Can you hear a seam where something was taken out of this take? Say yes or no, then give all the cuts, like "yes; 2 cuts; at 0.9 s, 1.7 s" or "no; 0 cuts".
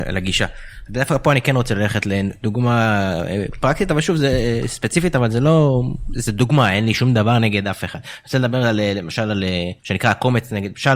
yes; 1 cut; at 9.8 s